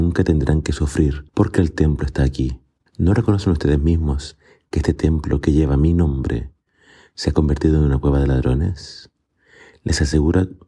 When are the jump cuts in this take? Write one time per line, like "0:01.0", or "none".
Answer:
0:01.3
0:02.9